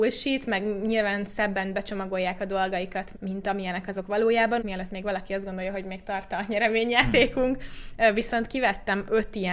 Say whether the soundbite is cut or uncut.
cut